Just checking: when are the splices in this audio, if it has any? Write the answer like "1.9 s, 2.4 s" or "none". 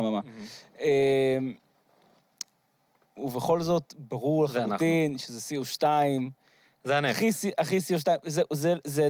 none